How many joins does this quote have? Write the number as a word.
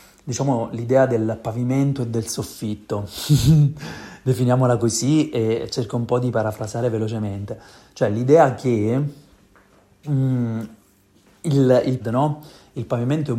one